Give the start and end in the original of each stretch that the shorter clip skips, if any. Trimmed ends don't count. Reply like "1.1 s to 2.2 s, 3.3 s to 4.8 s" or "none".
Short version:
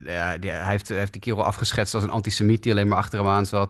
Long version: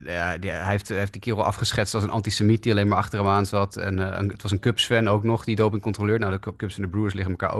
none